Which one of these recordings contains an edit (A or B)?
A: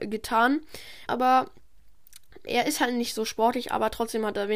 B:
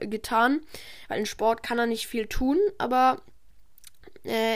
A